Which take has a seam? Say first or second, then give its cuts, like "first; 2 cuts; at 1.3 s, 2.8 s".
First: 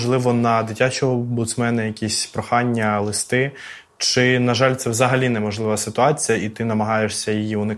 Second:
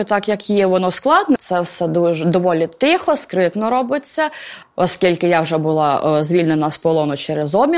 second; 2 cuts; at 1.4 s, 4.6 s